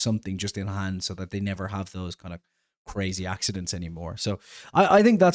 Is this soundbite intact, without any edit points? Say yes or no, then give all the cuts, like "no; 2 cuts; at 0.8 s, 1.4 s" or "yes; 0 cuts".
yes; 0 cuts